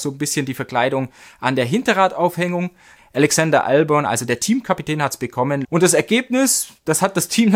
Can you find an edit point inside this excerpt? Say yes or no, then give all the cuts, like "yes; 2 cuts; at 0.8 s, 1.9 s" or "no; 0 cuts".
yes; 2 cuts; at 3.0 s, 5.6 s